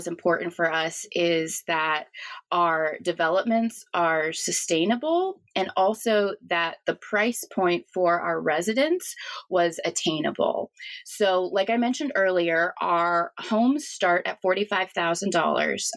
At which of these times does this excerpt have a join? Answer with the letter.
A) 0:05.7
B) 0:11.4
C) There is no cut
C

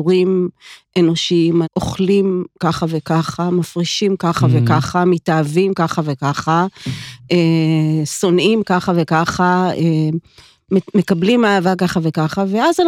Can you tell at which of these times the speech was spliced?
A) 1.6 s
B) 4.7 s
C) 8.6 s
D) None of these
A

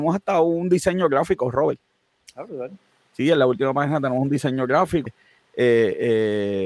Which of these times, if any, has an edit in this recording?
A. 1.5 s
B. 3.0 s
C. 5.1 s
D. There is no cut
C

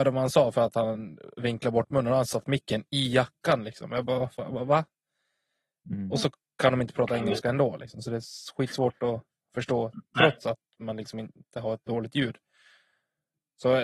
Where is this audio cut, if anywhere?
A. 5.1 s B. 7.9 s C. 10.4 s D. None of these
D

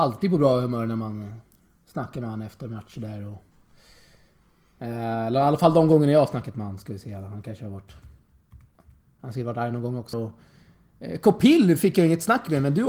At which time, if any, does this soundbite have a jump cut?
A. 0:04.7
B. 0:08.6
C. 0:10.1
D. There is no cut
C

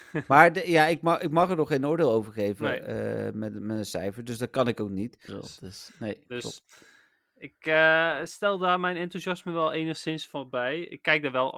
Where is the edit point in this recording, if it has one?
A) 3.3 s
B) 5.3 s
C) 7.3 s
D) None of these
B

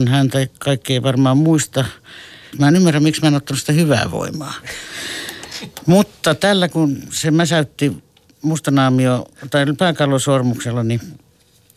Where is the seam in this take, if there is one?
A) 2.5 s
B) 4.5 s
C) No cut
A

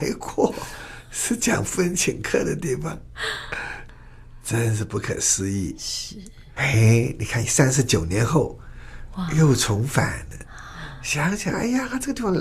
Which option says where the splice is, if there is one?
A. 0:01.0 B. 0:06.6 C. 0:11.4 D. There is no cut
B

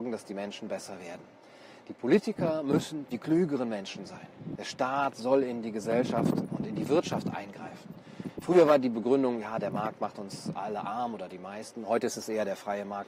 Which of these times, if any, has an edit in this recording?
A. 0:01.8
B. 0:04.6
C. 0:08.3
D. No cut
B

